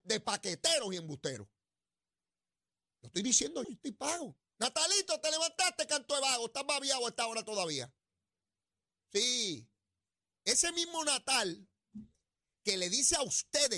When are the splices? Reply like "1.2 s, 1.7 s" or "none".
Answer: 3.6 s